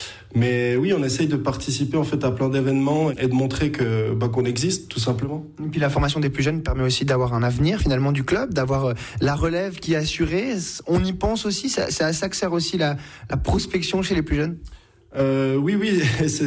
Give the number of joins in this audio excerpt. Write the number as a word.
zero